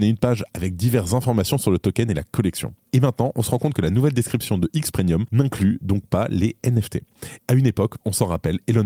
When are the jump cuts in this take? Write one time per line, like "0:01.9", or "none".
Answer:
0:07.4